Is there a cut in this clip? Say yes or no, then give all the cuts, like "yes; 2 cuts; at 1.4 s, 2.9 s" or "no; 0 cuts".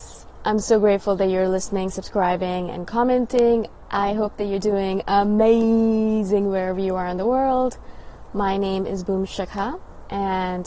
yes; 1 cut; at 3.8 s